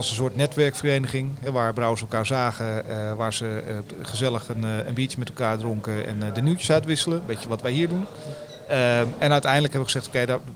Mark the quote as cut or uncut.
uncut